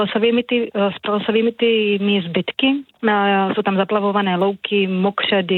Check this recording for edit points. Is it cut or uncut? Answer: uncut